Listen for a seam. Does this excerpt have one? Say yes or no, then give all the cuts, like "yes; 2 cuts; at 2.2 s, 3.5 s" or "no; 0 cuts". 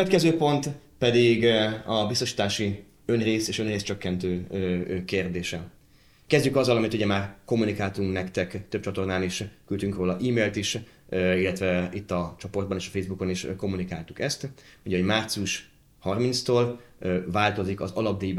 no; 0 cuts